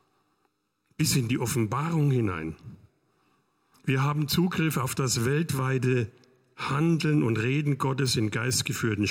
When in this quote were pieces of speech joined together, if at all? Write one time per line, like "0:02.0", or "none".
0:03.7